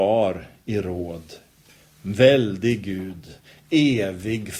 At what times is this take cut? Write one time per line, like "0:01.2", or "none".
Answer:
none